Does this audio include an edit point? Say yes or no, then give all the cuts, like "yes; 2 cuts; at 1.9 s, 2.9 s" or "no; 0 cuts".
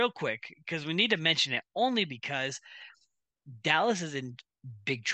no; 0 cuts